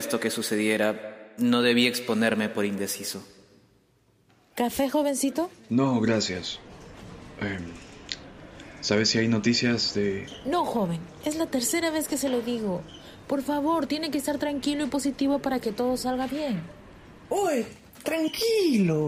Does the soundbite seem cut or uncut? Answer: uncut